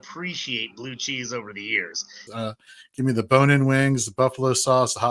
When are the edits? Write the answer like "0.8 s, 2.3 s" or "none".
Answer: 2.3 s